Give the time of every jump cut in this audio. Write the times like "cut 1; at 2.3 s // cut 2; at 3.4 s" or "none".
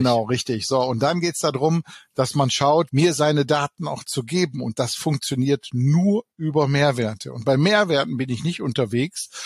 cut 1; at 2.9 s